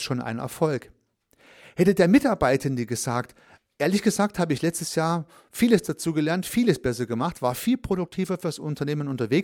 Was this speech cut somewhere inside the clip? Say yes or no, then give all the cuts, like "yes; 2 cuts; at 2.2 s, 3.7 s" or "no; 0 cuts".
no; 0 cuts